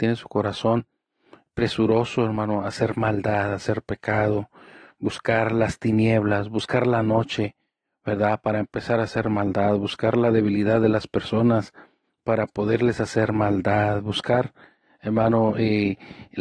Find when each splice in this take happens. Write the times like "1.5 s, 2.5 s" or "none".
none